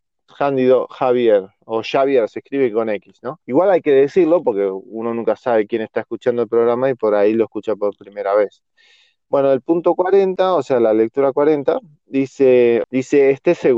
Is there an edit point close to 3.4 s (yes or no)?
yes